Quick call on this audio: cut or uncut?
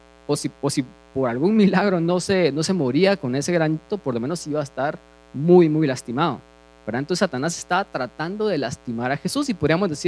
cut